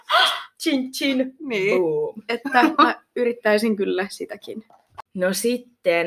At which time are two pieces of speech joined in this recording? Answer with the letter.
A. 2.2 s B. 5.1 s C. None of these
C